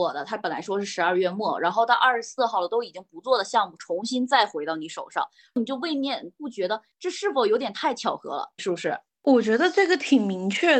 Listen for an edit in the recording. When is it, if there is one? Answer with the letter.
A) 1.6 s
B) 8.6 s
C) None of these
B